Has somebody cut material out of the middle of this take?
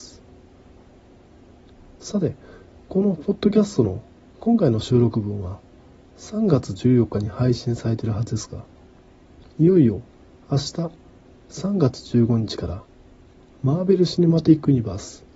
no; 0 cuts

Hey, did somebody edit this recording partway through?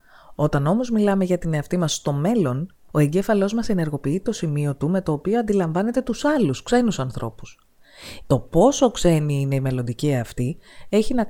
yes; 1 cut; at 8.2 s

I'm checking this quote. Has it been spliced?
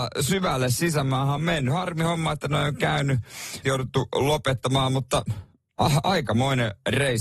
yes; 1 cut; at 3.6 s

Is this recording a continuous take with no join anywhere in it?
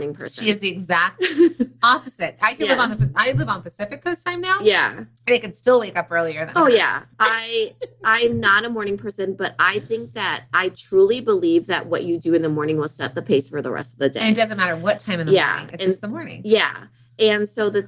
yes; 0 cuts

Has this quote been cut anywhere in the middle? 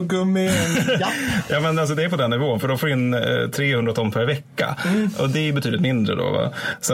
no; 0 cuts

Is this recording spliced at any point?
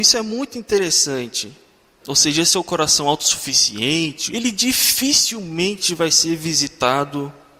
yes; 2 cuts; at 2.0 s, 4.3 s

